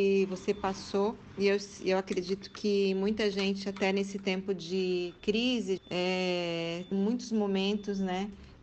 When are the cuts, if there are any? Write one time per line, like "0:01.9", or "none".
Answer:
0:05.8
0:06.9